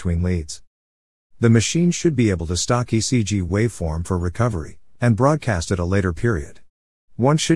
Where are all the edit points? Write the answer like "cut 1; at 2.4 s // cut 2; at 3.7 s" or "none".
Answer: cut 1; at 5.0 s